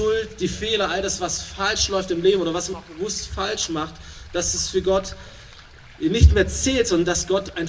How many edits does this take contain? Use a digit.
0